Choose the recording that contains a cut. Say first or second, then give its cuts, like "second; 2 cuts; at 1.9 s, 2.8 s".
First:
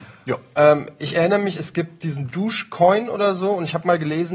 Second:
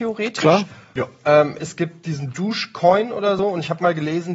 second; 2 cuts; at 1.6 s, 3.4 s